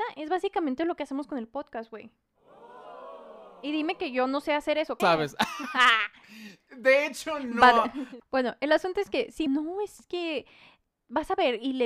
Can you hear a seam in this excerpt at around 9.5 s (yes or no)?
yes